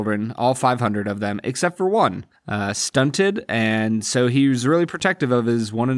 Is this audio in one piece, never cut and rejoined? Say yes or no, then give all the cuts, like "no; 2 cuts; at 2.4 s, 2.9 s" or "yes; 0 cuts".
no; 1 cut; at 2.3 s